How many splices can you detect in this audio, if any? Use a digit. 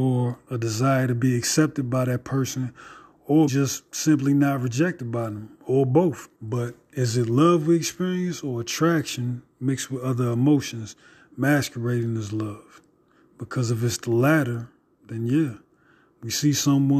2